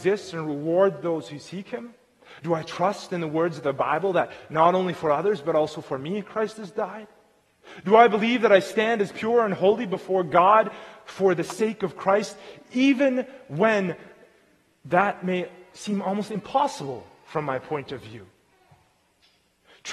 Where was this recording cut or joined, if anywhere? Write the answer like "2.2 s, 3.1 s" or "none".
2.4 s